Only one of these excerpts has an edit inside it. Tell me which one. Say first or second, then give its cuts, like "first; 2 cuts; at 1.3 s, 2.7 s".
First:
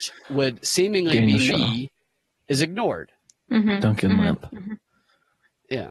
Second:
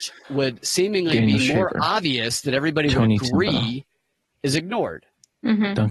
first; 1 cut; at 1.5 s